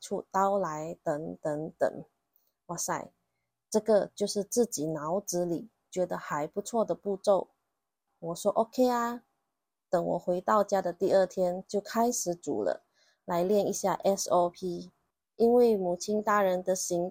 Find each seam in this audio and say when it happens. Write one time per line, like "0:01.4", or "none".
0:08.1